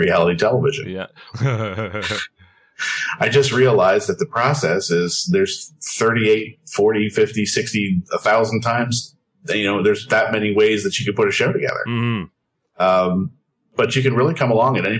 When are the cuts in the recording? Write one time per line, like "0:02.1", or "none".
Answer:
0:01.3